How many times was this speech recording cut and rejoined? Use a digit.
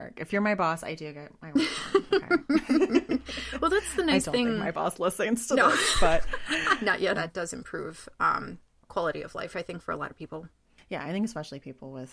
1